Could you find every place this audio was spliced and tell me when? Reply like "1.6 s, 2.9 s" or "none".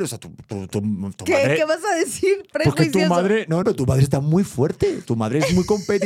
3.6 s

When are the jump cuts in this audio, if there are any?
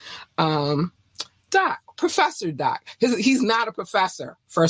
none

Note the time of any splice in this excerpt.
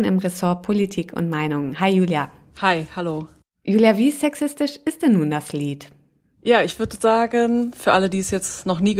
none

